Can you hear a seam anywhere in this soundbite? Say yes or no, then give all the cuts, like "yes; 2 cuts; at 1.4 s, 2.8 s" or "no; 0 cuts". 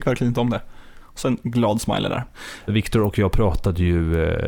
yes; 2 cuts; at 1.0 s, 2.6 s